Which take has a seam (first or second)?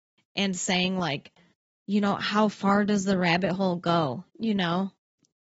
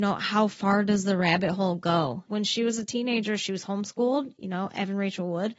second